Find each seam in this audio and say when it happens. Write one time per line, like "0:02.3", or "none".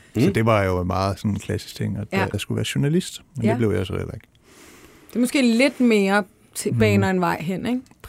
0:02.3